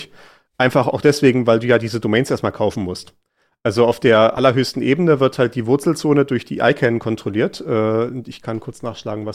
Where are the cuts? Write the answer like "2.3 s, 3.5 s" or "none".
none